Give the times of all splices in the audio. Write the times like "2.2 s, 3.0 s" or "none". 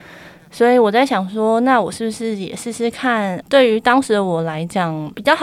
3.4 s